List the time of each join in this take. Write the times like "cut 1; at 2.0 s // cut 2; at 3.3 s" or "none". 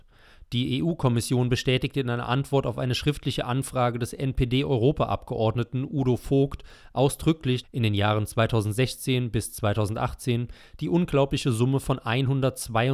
cut 1; at 7.6 s